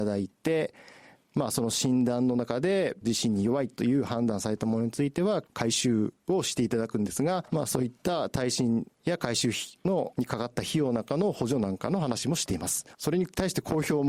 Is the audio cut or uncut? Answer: cut